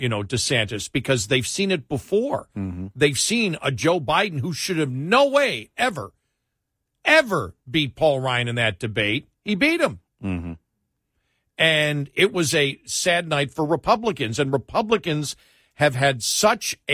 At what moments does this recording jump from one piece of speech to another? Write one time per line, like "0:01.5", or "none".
none